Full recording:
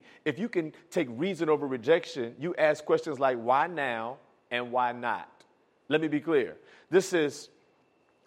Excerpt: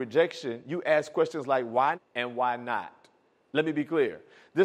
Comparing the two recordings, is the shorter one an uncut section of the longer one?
no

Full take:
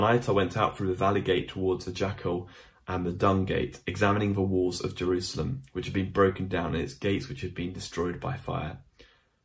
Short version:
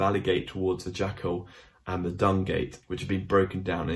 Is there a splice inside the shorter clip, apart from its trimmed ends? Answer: yes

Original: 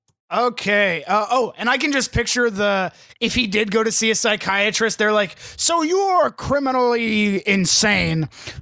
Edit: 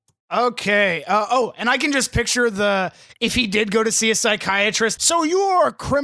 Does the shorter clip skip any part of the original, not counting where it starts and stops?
yes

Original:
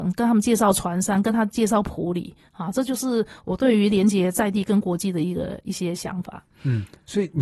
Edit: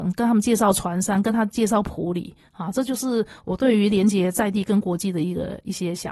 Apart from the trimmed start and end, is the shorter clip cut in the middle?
no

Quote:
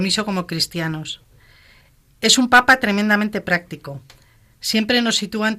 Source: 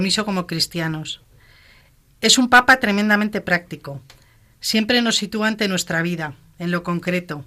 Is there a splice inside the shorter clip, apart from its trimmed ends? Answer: no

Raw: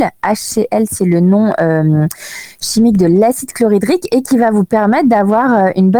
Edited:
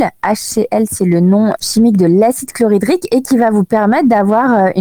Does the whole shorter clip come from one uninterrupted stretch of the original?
no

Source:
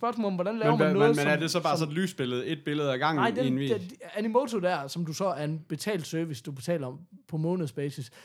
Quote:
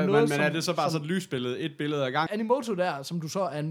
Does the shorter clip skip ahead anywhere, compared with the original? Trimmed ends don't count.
yes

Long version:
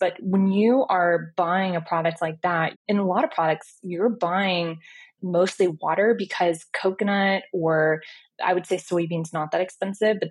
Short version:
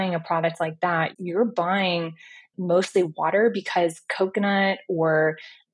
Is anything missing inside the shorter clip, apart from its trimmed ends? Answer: yes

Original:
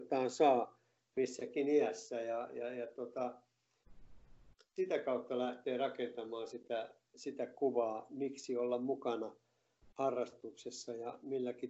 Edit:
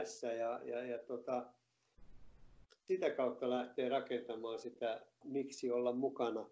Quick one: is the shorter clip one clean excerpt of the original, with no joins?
no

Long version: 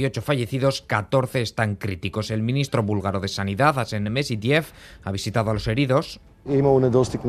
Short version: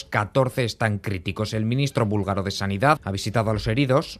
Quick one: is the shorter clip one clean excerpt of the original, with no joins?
no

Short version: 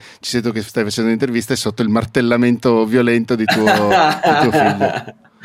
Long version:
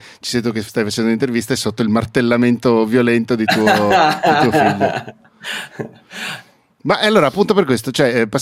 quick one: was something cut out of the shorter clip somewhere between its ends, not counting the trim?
no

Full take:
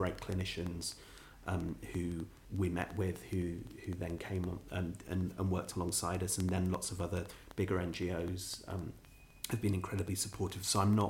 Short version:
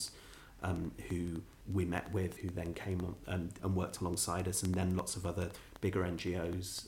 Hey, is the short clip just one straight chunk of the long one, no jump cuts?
no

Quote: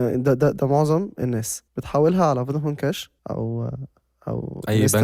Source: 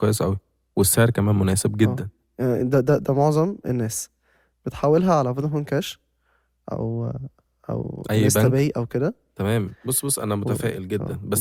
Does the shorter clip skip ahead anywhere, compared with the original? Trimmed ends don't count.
yes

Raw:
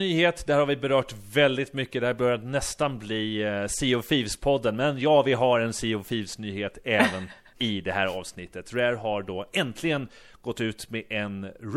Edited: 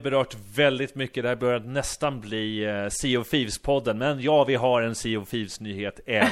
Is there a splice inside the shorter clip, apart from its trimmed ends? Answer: no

